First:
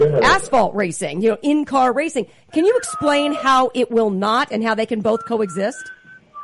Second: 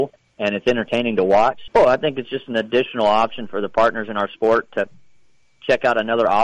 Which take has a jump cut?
second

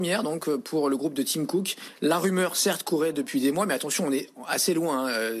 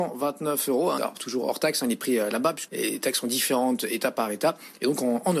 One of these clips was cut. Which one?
second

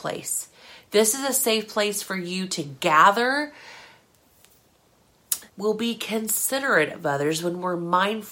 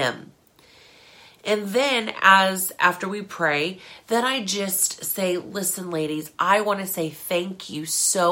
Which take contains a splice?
first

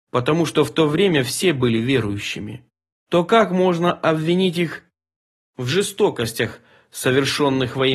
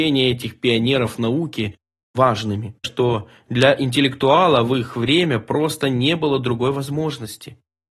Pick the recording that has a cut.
second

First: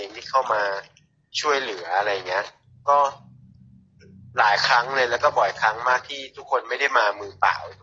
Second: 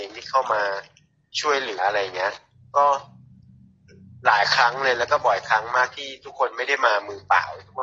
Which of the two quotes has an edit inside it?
second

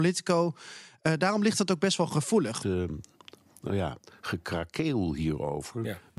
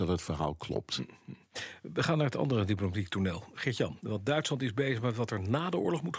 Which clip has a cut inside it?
first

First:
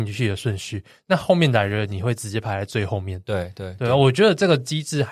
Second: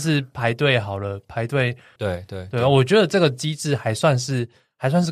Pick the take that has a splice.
second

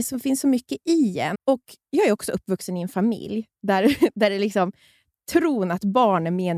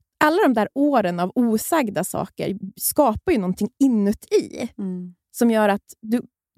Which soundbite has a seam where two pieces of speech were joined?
first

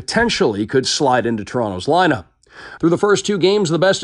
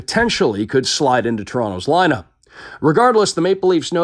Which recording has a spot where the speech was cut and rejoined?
first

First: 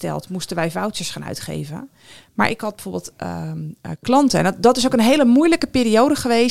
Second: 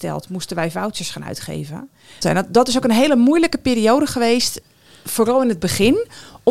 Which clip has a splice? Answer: second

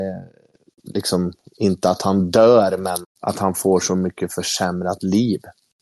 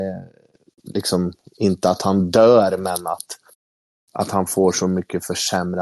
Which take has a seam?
first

